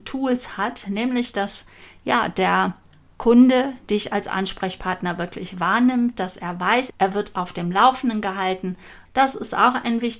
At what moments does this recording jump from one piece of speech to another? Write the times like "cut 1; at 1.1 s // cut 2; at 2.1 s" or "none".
cut 1; at 6.9 s // cut 2; at 9.0 s